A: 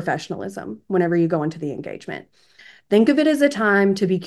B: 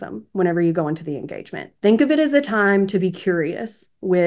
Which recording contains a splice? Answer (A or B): B